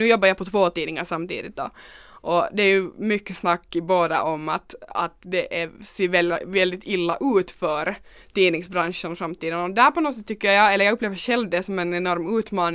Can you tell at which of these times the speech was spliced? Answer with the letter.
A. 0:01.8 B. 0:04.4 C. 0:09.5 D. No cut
D